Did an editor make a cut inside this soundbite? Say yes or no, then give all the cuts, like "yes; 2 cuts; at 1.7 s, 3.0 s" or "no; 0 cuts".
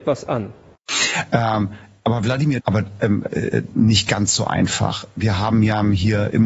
yes; 2 cuts; at 2.6 s, 3.7 s